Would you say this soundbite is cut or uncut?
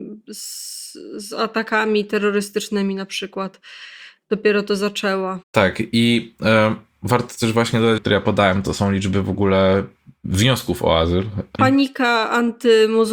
cut